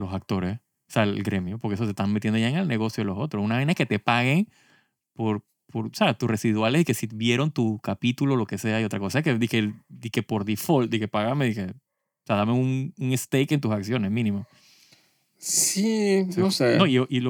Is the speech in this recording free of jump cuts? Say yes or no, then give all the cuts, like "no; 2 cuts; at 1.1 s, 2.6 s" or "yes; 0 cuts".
yes; 0 cuts